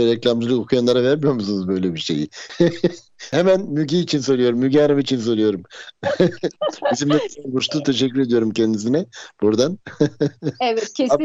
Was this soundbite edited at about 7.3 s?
yes; 1 cut; at 7.3 s

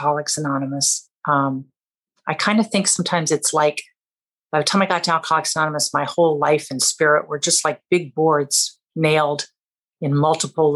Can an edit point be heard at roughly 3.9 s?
no; 1 cut; at 1.2 s

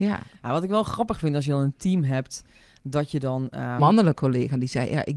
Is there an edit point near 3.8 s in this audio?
yes; 1 cut; at 3.8 s

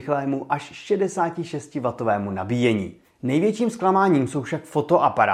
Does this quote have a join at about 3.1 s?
no; 0 cuts

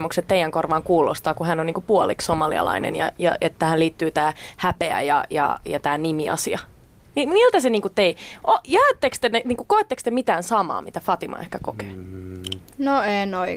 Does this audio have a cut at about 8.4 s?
no; 0 cuts

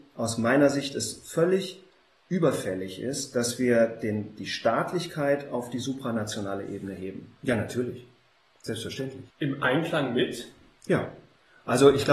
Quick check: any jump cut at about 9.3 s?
yes; 2 cuts; at 7.4 s, 9.3 s

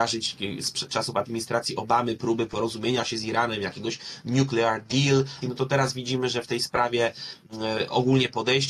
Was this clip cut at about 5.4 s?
yes; 1 cut; at 5.4 s

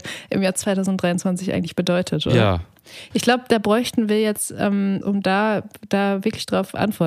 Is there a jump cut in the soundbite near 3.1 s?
yes; 2 cuts; at 3.1 s, 5.0 s

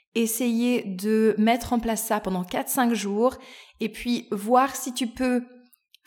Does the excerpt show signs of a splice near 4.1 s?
no; 0 cuts

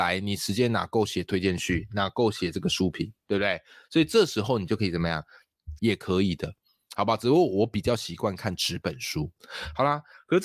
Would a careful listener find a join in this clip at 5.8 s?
yes; 1 cut; at 5.8 s

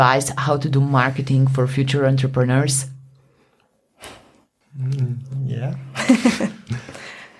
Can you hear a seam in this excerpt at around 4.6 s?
yes; 1 cut; at 4.6 s

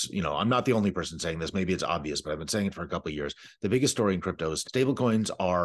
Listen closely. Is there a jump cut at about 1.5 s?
no; 1 cut; at 4.6 s

